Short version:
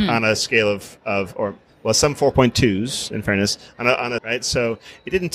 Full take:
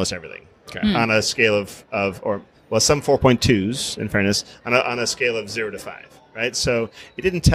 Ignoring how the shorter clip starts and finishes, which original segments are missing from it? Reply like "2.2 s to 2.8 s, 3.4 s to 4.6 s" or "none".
5.0 s to 6.3 s

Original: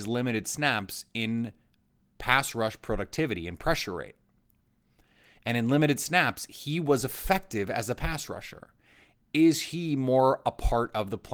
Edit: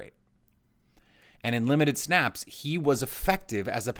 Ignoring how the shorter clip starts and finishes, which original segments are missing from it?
none

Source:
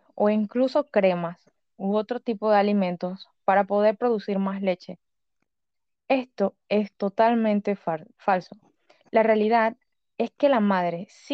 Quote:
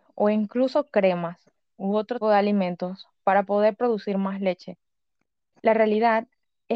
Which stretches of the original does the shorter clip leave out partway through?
2.2 s to 2.4 s, 5.7 s to 9.0 s

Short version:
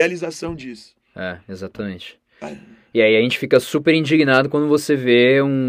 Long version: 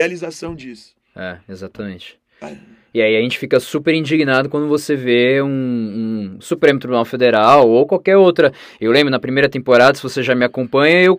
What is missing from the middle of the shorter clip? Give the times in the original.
none

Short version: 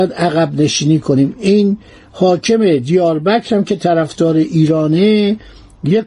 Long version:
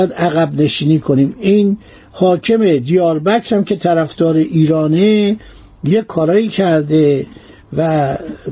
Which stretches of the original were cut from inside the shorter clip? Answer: none

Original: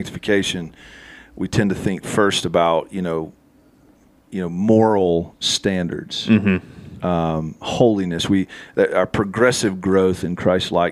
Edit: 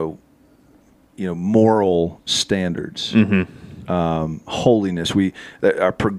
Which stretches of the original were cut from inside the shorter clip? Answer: none

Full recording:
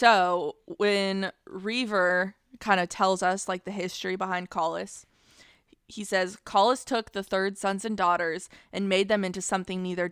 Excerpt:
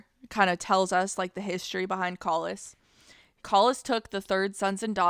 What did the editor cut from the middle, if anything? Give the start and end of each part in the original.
5.7 s to 6.4 s

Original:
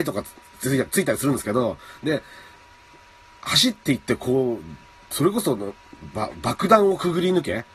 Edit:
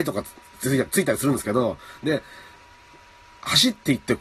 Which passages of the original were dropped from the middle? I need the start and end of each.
none

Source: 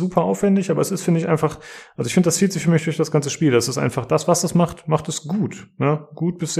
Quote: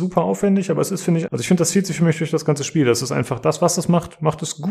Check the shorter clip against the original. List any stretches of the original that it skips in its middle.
1.3 s to 1.9 s

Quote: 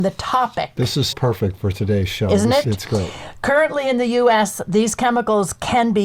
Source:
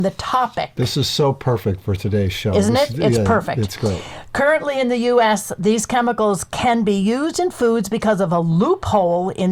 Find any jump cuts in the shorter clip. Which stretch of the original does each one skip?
1.1 s to 1.4 s, 2.9 s to 3.5 s

